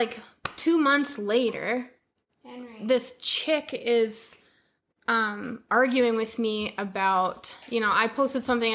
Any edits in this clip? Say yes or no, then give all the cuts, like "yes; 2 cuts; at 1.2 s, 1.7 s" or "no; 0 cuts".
no; 0 cuts